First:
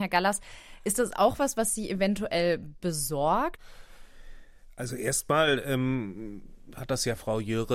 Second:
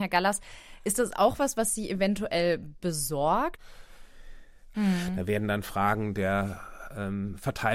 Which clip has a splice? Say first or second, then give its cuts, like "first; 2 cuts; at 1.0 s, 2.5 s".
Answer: second; 1 cut; at 4.7 s